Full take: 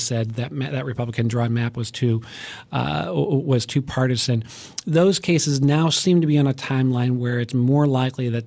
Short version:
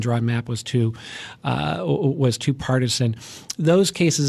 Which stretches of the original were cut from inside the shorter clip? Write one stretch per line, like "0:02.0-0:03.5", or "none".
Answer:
none